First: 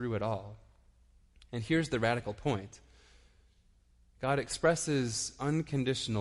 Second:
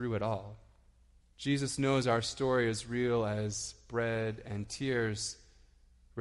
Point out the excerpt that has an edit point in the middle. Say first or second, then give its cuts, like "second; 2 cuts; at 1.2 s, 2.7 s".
second; 1 cut; at 1.2 s